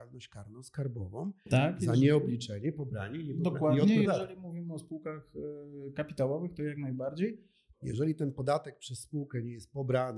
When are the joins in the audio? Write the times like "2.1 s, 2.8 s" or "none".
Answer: 4.0 s, 7.7 s